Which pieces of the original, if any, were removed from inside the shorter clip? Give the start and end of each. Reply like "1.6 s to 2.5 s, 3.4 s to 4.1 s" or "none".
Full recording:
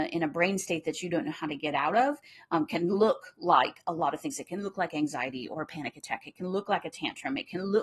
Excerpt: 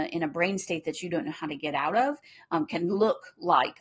none